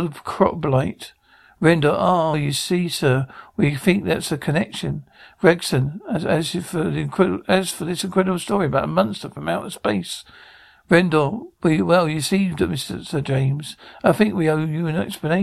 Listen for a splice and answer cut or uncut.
cut